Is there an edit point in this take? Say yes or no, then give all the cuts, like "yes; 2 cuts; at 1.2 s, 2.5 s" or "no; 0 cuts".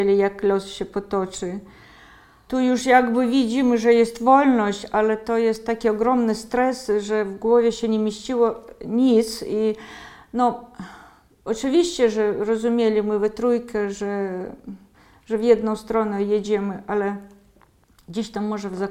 yes; 1 cut; at 2.5 s